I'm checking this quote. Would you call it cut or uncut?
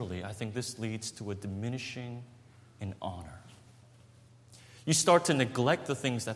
uncut